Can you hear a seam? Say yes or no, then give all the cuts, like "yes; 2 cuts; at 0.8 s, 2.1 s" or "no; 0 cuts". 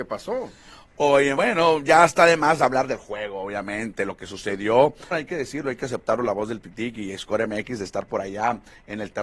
yes; 2 cuts; at 1.4 s, 5.1 s